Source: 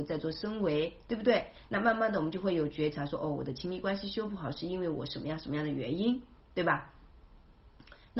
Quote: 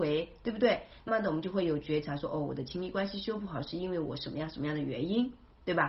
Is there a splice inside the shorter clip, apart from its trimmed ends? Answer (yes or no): yes